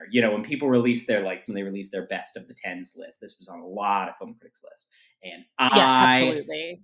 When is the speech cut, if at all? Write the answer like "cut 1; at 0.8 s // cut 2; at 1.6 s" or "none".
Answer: cut 1; at 1.5 s